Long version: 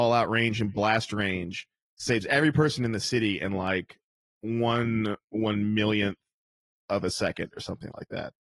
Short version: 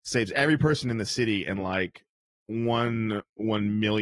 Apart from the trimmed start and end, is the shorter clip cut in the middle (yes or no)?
no